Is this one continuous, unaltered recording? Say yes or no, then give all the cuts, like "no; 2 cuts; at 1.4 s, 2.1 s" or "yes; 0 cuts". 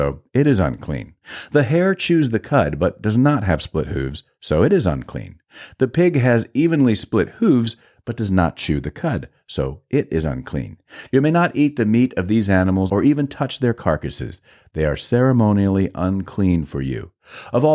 yes; 0 cuts